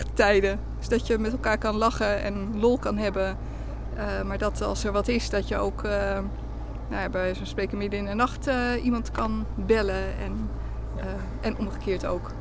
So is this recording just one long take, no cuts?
yes; 0 cuts

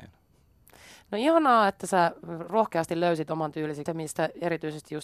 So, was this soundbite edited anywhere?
yes; 1 cut; at 3.9 s

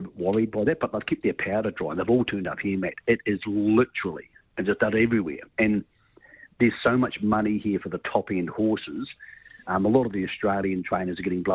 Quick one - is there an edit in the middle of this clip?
no; 0 cuts

